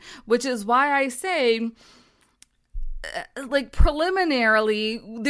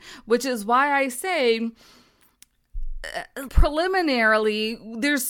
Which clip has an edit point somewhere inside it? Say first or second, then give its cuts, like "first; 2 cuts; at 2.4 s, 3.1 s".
second; 1 cut; at 3.5 s